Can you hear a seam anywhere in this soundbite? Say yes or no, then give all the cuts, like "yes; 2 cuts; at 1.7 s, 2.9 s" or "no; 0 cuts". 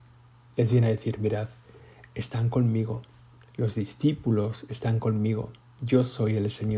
no; 0 cuts